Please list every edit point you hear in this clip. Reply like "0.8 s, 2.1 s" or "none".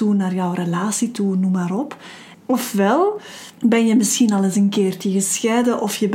2.3 s, 3.5 s